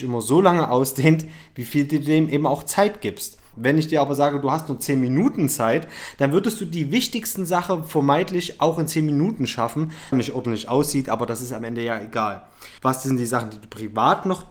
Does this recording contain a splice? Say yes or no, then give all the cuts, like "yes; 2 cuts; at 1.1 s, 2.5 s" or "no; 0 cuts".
yes; 3 cuts; at 3.5 s, 10.1 s, 12.8 s